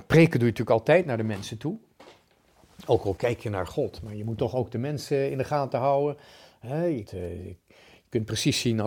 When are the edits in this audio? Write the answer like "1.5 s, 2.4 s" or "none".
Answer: 7.1 s